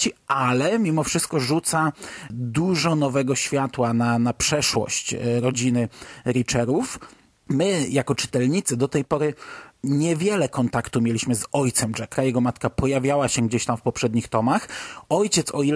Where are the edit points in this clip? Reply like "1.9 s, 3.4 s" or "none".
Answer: 12.1 s